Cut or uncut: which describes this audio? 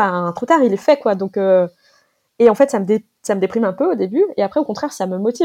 uncut